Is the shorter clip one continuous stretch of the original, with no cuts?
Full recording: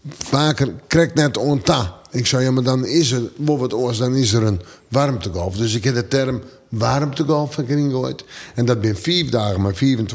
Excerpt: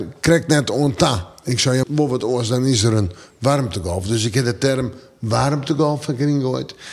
no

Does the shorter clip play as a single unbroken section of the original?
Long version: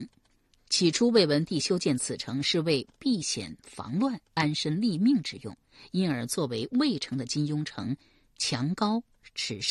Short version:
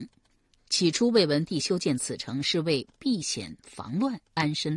yes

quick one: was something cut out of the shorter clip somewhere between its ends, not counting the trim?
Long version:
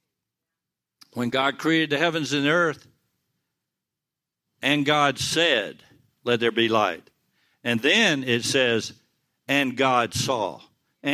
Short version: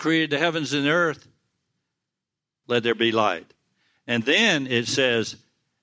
yes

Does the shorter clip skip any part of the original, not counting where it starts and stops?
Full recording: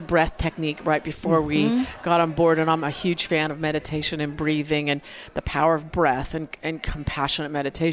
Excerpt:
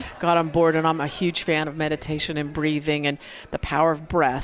no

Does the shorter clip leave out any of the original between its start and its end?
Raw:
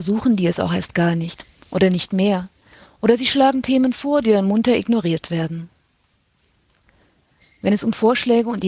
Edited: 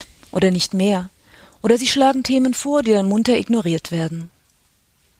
no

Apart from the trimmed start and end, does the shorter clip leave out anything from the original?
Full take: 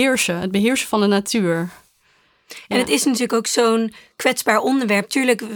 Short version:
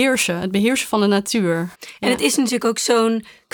yes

